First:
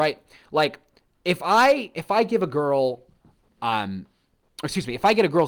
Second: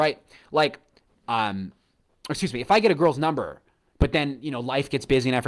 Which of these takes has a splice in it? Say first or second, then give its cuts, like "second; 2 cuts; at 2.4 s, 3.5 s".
second; 1 cut; at 1.1 s